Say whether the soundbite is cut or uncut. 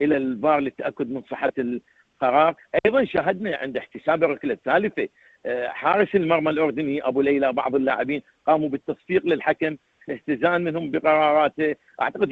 cut